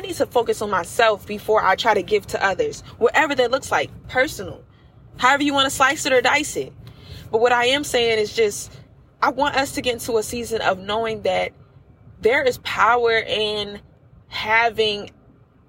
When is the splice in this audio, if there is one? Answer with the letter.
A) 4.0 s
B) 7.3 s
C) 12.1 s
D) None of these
A